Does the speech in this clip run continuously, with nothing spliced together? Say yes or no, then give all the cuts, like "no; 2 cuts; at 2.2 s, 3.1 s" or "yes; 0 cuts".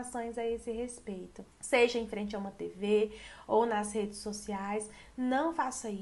no; 1 cut; at 1.5 s